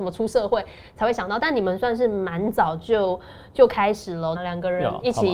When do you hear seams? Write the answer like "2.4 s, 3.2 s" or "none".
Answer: 4.4 s